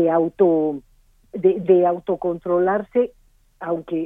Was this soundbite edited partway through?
yes; 1 cut; at 1.6 s

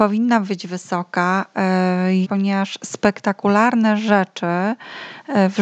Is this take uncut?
no; 1 cut; at 2.2 s

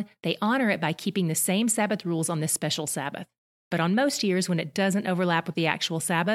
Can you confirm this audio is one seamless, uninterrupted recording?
no; 1 cut; at 3.5 s

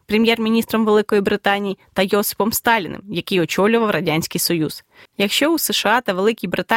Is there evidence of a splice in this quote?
yes; 1 cut; at 5.1 s

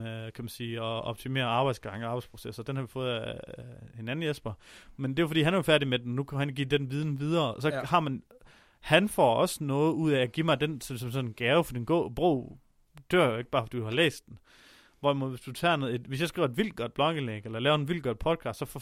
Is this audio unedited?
yes; 0 cuts

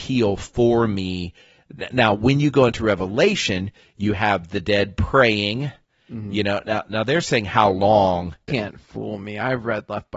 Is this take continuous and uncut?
no; 1 cut; at 8.5 s

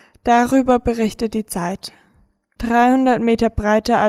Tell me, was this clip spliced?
yes; 1 cut; at 2.6 s

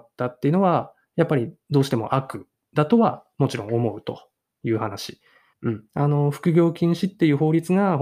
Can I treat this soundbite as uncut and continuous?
no; 1 cut; at 5.5 s

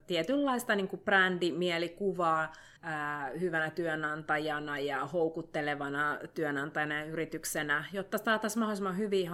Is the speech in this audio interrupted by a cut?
yes; 1 cut; at 2.8 s

